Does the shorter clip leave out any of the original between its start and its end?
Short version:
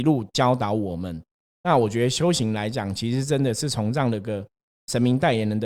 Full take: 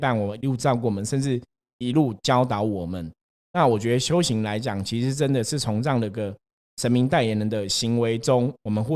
no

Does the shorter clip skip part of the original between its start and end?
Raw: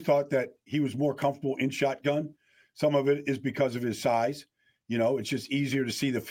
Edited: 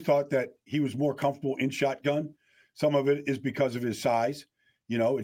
no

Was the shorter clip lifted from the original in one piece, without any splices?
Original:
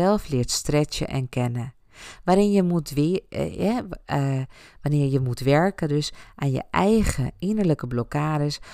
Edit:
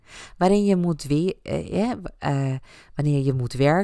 yes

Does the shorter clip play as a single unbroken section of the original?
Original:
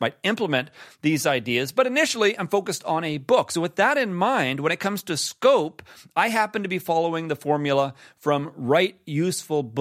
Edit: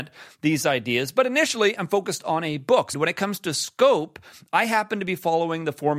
no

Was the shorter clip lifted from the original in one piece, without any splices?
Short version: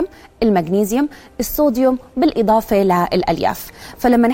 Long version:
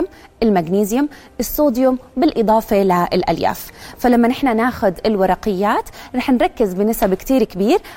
yes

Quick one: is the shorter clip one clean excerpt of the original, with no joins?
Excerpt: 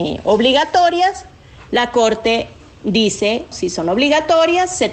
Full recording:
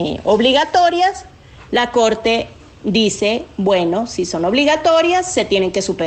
no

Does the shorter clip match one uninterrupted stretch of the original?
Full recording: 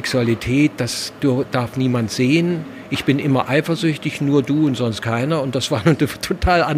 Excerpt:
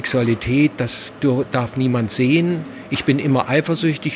yes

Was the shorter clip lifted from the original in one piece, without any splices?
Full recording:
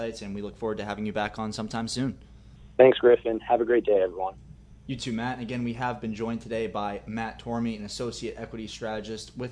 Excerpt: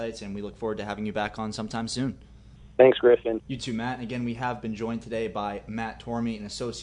no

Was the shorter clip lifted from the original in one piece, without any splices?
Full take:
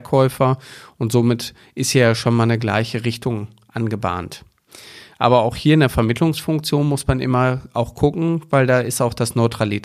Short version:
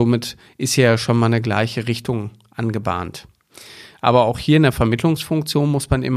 yes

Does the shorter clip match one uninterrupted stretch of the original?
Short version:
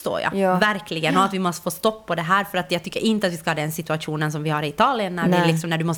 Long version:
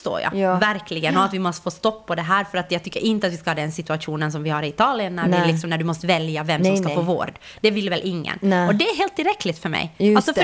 yes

